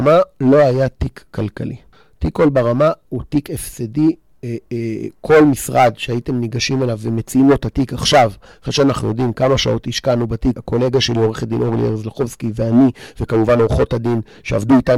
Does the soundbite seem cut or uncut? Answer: cut